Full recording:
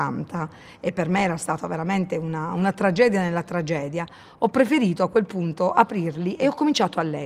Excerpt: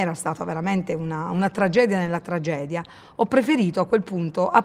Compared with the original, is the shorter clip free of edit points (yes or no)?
yes